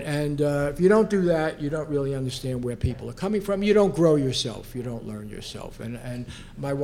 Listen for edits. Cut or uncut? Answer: uncut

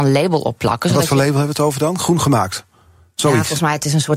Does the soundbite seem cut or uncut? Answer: uncut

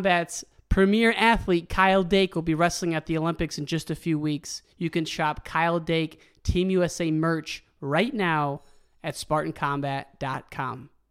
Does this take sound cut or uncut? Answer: uncut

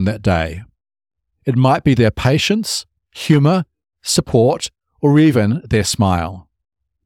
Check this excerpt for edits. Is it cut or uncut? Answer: uncut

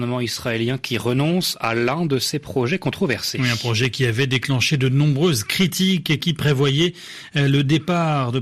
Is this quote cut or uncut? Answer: uncut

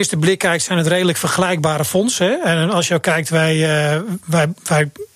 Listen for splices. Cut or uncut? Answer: uncut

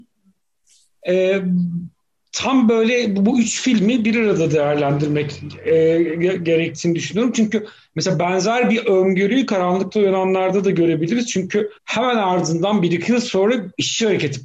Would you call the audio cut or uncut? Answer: cut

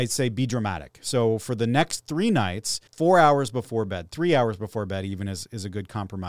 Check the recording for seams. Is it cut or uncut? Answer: cut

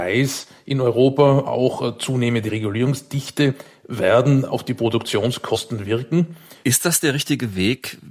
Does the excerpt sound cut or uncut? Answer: cut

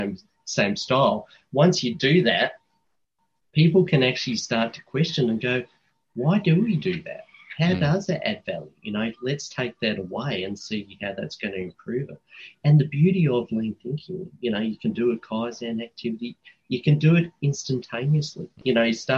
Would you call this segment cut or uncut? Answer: uncut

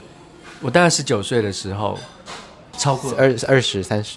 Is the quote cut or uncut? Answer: cut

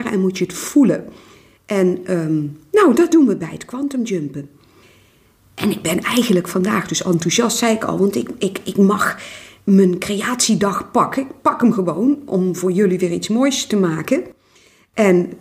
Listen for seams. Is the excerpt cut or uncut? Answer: uncut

